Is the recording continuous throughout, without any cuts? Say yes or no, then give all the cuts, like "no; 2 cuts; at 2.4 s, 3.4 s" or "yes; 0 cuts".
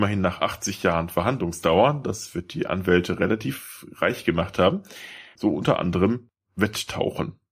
no; 1 cut; at 5.4 s